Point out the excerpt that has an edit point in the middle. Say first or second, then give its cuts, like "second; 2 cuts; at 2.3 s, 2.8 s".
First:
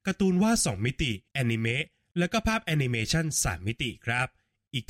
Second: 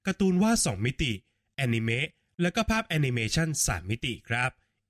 first; 1 cut; at 1.3 s